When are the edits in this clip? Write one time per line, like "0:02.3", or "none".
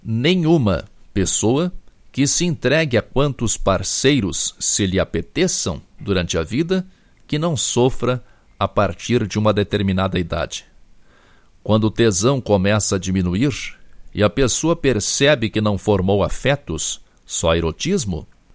none